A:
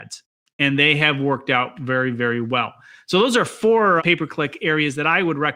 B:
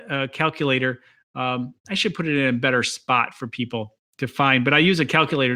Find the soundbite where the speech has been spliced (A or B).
A